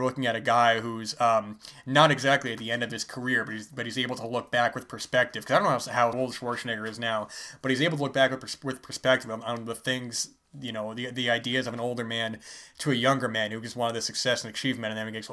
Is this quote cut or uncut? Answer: cut